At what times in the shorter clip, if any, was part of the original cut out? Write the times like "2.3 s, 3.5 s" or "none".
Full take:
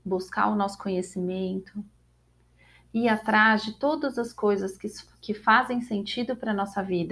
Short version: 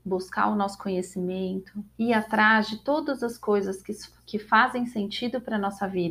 1.9 s